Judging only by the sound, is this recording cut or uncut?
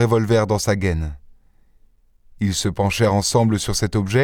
uncut